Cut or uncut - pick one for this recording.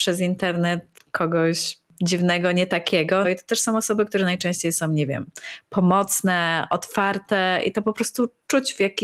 cut